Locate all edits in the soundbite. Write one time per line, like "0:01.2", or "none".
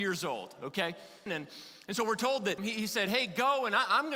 0:01.3
0:02.6